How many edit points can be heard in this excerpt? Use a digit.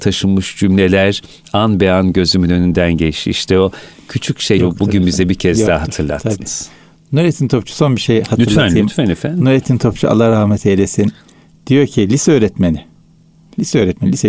1